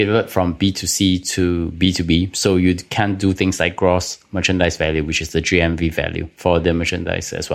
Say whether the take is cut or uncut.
uncut